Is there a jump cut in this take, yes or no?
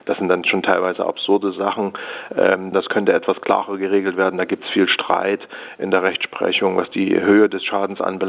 yes